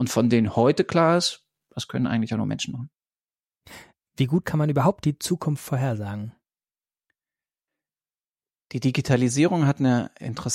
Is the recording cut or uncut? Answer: uncut